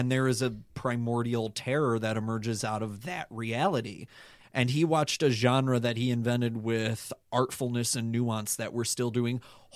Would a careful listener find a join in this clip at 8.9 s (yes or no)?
no